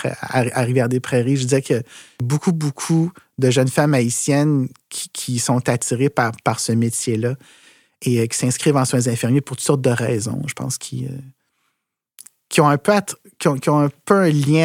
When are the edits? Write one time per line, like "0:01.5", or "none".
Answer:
none